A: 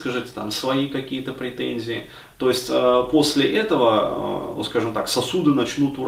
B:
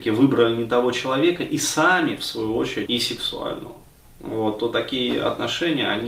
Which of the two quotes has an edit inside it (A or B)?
B